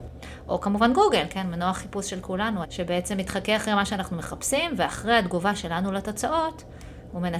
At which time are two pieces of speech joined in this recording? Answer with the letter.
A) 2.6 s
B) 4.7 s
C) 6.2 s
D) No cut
A